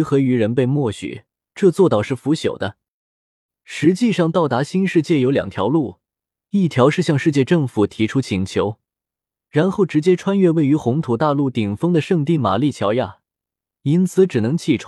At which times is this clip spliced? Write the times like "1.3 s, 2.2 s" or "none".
1.5 s

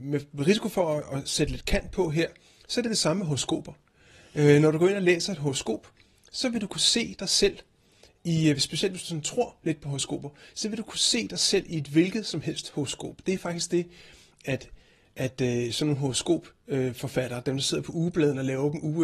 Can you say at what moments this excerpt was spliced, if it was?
none

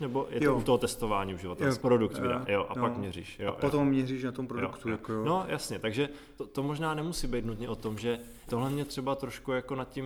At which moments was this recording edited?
1.8 s, 6.4 s, 8.5 s

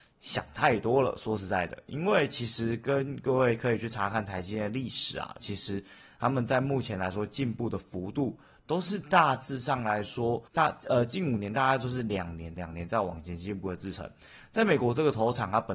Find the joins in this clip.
5.4 s, 10.5 s, 12.6 s

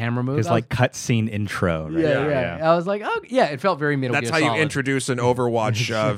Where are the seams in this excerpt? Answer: none

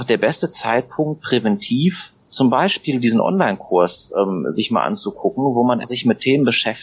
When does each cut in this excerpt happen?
5.8 s

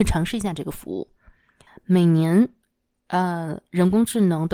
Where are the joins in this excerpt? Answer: 1.7 s

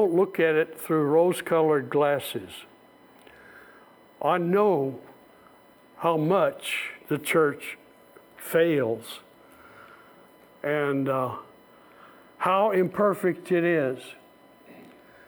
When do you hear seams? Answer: none

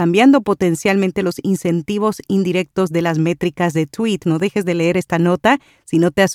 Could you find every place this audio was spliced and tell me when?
4.2 s

